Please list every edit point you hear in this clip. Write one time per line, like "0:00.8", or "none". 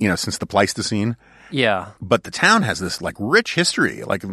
none